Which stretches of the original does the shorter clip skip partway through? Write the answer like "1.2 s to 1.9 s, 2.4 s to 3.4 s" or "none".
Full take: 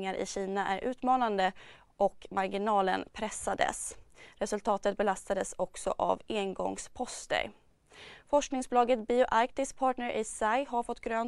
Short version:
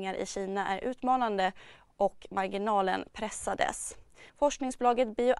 4.3 s to 8.2 s